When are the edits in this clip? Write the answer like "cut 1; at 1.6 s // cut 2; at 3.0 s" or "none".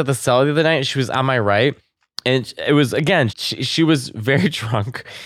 cut 1; at 3.3 s